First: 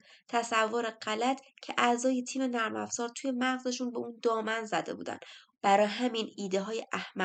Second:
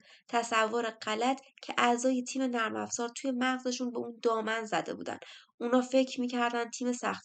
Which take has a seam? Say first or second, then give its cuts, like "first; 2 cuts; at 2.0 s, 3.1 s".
first; 1 cut; at 5.5 s